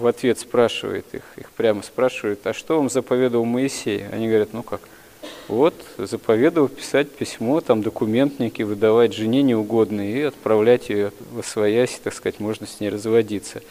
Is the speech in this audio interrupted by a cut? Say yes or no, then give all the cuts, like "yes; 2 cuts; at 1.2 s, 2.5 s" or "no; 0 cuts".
no; 0 cuts